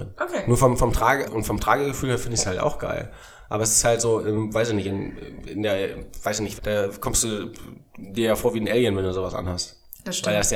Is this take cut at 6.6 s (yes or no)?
yes